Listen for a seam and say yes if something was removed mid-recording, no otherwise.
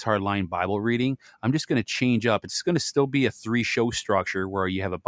no